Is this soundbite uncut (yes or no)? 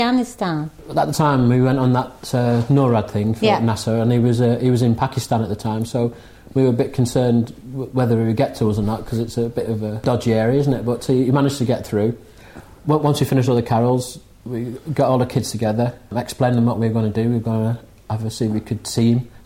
yes